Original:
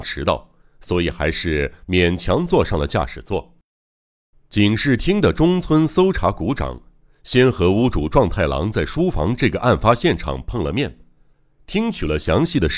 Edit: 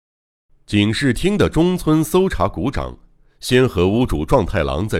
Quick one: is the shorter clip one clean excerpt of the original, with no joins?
yes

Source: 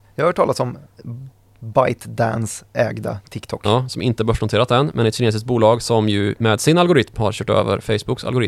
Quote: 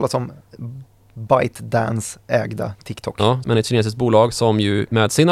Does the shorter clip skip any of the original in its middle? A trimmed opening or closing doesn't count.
yes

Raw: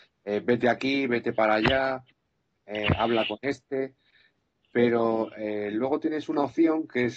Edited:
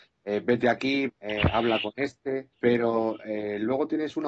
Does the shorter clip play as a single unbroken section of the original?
no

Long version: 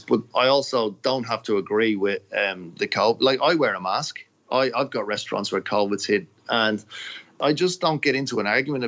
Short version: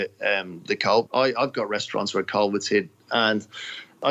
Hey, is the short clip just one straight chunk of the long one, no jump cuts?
no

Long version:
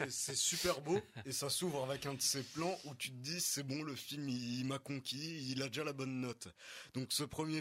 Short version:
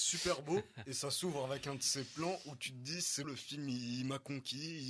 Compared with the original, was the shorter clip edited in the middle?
yes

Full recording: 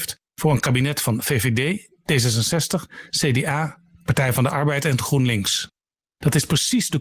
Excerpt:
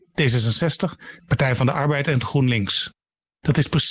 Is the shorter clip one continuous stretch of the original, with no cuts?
no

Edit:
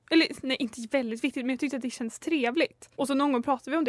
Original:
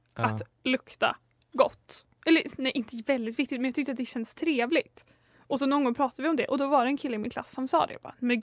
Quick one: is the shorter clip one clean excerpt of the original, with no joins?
no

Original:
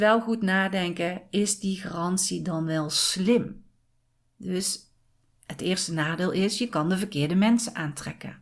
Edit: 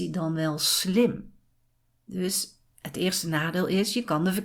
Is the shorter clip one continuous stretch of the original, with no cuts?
no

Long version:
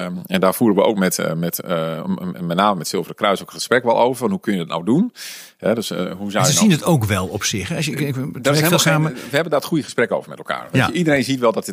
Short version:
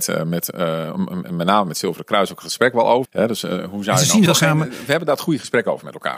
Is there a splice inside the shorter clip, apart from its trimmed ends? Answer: yes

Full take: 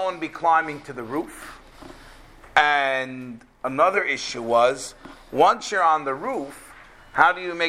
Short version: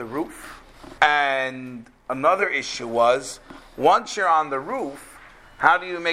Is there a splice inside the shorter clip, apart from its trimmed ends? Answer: yes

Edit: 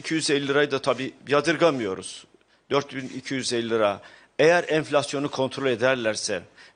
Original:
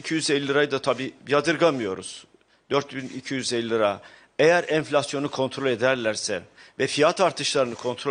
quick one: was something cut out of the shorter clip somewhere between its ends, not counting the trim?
no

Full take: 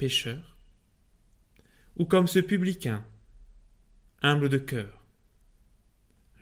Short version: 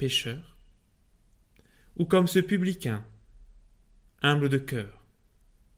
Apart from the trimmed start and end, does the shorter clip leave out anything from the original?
no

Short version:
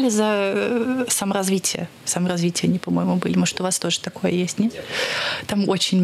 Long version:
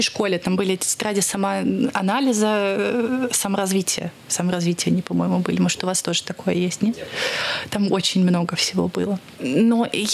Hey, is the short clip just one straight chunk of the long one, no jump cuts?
yes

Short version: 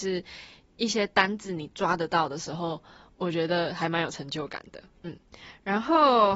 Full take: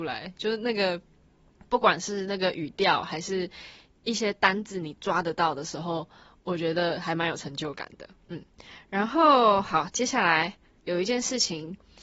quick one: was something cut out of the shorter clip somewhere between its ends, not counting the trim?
no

